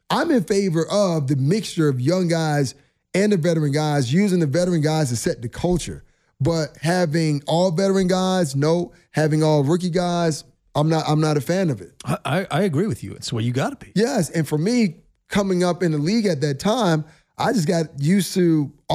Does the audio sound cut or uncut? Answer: cut